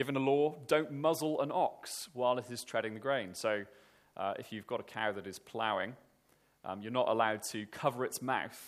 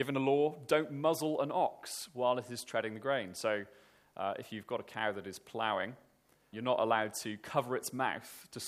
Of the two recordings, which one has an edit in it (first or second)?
second